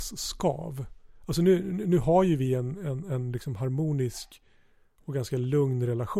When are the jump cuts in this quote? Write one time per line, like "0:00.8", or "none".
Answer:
none